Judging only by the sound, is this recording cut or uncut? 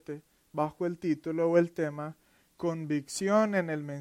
uncut